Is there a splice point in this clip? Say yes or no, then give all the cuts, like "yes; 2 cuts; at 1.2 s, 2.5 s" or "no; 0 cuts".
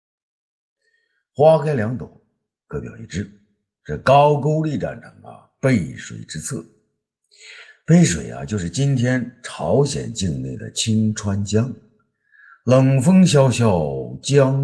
no; 0 cuts